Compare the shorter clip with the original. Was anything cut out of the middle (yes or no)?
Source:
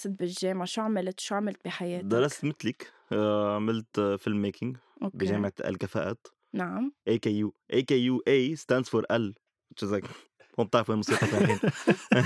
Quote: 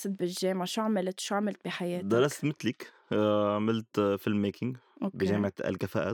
no